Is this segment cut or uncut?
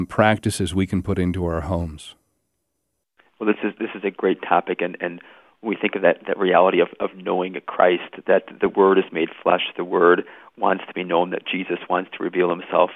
uncut